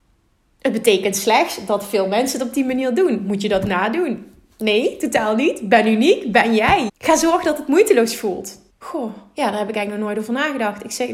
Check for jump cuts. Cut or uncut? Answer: cut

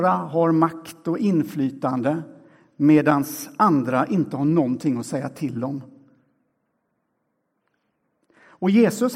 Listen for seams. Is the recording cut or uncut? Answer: uncut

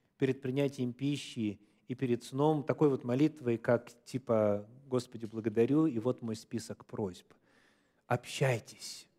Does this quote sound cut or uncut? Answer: uncut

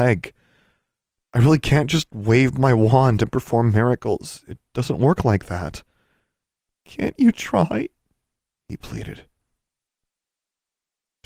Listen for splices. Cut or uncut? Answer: uncut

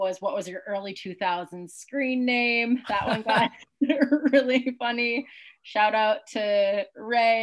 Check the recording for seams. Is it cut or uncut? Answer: uncut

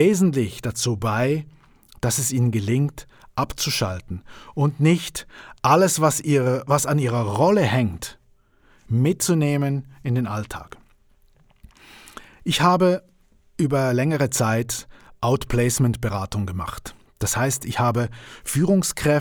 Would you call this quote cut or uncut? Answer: uncut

